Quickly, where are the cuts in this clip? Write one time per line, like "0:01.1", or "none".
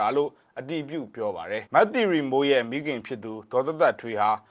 0:01.7